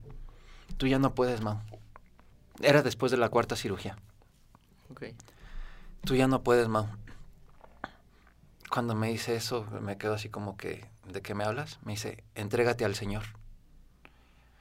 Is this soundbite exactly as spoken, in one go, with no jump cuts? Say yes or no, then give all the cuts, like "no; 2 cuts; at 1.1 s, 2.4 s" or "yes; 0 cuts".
yes; 0 cuts